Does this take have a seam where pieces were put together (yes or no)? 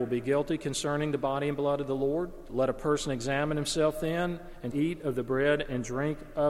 yes